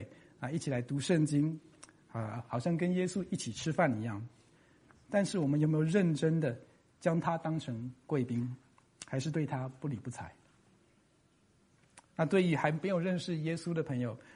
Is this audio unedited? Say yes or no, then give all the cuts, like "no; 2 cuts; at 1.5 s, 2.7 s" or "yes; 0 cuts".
yes; 0 cuts